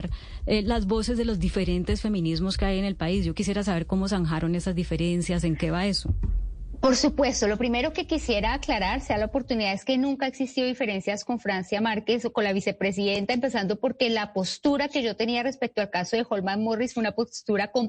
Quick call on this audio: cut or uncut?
uncut